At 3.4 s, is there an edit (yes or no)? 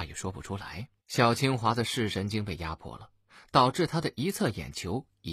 no